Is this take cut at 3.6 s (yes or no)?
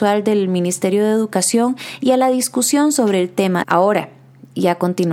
yes